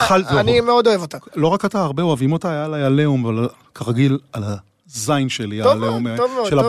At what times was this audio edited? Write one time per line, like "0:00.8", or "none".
none